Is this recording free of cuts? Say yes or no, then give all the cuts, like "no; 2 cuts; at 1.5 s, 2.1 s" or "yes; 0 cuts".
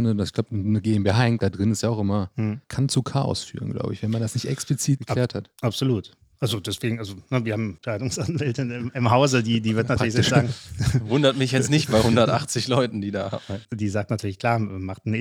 yes; 0 cuts